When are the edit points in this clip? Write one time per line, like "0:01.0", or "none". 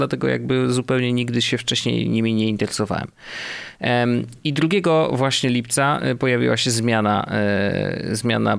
none